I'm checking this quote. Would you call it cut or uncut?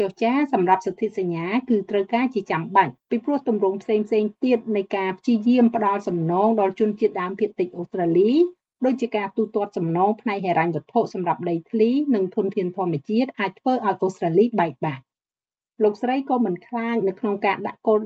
cut